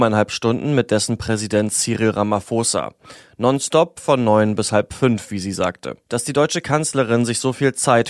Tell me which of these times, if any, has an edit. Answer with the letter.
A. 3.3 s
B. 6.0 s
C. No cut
B